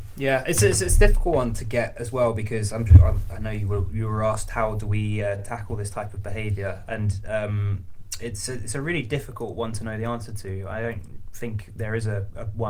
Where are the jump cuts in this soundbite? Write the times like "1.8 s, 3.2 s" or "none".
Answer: none

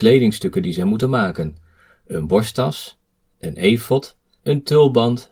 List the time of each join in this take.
4.4 s

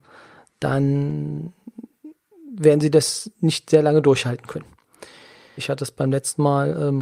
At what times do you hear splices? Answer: 5.6 s

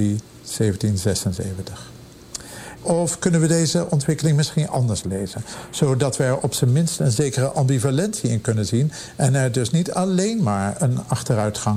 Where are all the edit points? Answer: 2.8 s

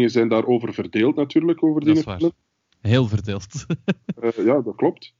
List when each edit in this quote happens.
none

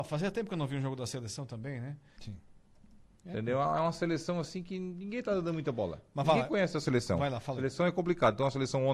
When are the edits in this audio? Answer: 2.2 s

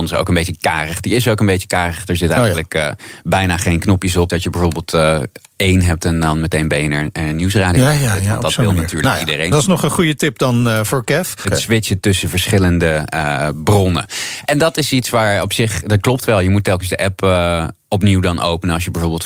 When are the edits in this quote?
4.3 s, 11.4 s

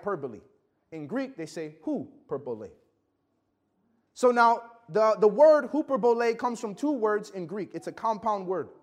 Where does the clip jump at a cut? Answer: none

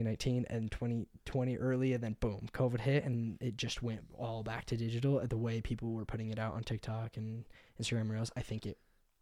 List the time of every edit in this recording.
5.3 s

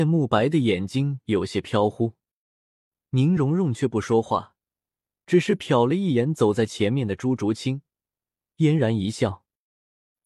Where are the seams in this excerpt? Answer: none

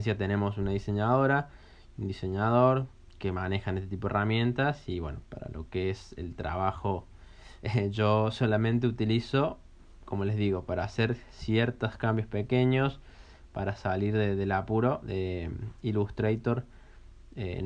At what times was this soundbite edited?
7.6 s

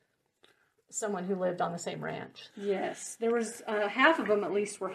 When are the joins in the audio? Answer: 2.5 s

